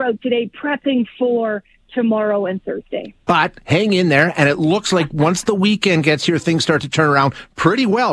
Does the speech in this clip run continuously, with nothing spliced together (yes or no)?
yes